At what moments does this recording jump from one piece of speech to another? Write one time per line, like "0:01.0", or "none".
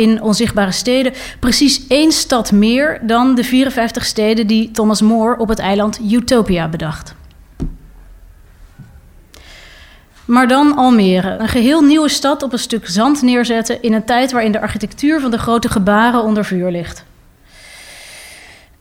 0:11.4